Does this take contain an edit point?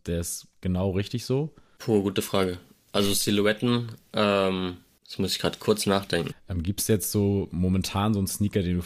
yes; 1 cut; at 6.3 s

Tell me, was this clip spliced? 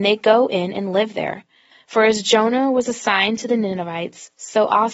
yes; 1 cut; at 1.7 s

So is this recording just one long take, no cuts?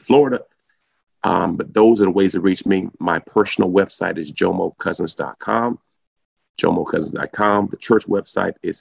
no; 1 cut; at 1.1 s

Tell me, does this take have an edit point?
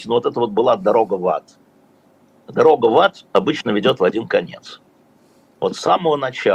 no; 0 cuts

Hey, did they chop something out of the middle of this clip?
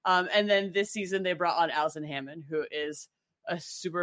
no; 0 cuts

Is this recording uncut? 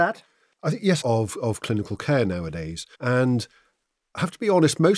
no; 2 cuts; at 1.0 s, 2.9 s

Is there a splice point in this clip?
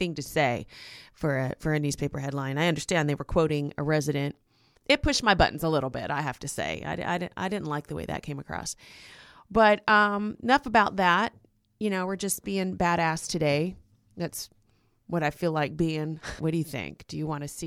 yes; 2 cuts; at 4.8 s, 16.4 s

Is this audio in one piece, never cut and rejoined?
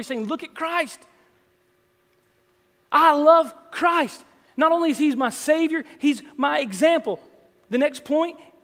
yes; 0 cuts

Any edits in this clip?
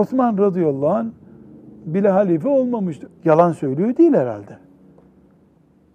yes; 1 cut; at 3.1 s

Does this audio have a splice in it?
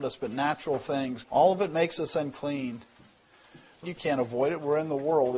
yes; 2 cuts; at 1.2 s, 3.8 s

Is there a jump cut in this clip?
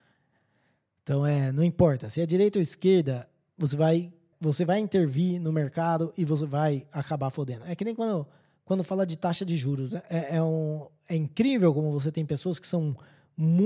yes; 1 cut; at 4.3 s

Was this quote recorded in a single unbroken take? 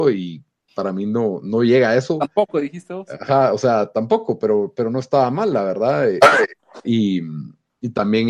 no; 1 cut; at 6.8 s

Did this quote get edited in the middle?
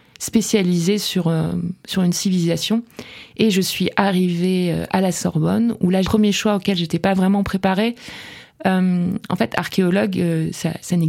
yes; 2 cuts; at 3.3 s, 6.0 s

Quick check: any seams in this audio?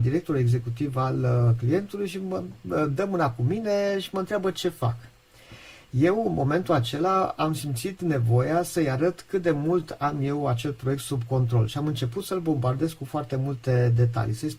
no; 0 cuts

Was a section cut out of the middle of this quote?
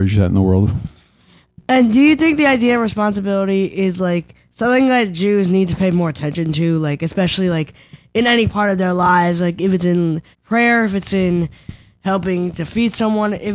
yes; 1 cut; at 10.3 s

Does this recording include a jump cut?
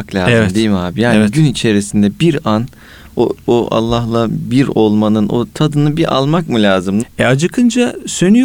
yes; 2 cuts; at 3.4 s, 7.0 s

